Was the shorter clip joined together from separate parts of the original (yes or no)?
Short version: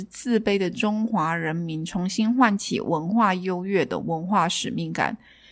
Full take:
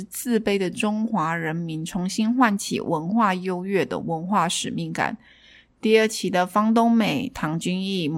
no